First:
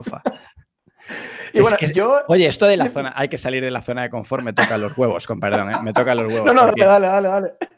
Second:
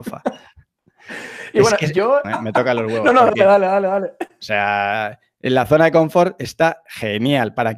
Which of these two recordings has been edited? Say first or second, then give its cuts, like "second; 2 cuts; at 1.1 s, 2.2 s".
second; 1 cut; at 2.2 s